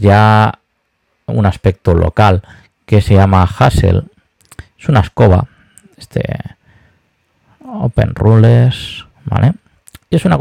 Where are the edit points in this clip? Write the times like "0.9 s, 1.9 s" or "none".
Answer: 9.1 s